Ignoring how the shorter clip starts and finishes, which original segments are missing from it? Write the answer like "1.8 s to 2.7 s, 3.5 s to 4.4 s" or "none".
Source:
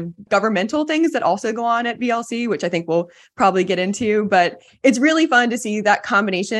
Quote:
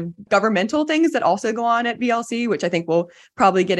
none